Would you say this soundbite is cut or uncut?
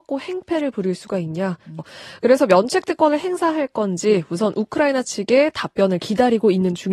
cut